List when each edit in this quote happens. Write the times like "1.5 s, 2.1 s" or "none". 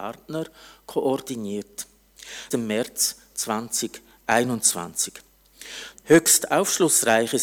2.5 s, 5.9 s